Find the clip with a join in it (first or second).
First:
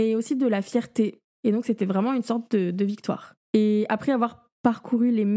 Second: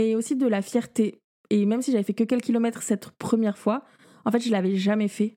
first